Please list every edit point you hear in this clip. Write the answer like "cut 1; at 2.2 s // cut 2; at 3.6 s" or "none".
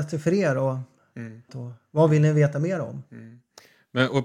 cut 1; at 1.5 s